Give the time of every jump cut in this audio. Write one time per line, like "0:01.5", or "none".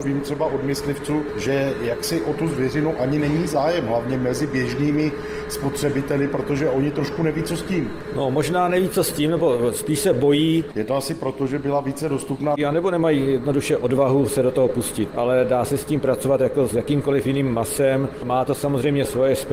0:10.7
0:12.6
0:16.7